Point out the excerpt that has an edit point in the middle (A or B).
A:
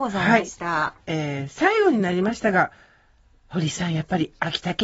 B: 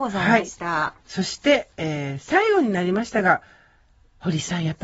A